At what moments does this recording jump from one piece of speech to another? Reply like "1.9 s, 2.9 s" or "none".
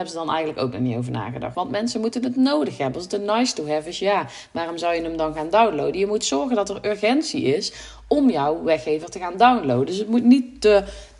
1.5 s